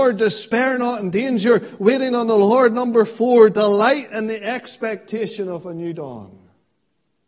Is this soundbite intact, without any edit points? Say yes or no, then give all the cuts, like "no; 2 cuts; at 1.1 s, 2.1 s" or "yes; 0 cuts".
yes; 0 cuts